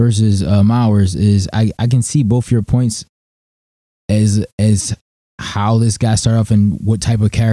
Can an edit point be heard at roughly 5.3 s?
no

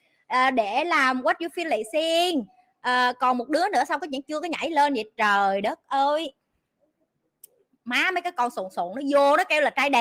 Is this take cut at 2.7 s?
no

